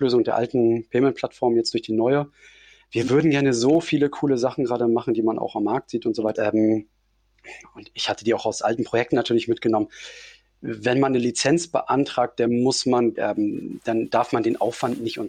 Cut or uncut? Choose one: cut